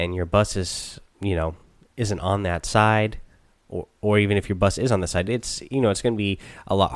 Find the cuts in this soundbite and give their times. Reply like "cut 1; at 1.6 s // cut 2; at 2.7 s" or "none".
none

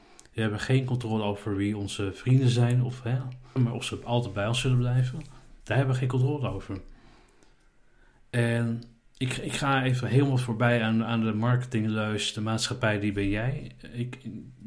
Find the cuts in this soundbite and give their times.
cut 1; at 3.6 s

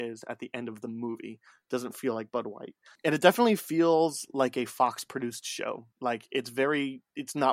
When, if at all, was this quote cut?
cut 1; at 5.9 s

